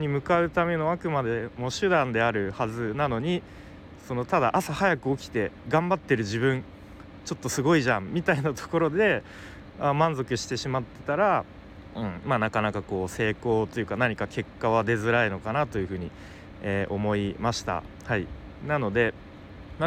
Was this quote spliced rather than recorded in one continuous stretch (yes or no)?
no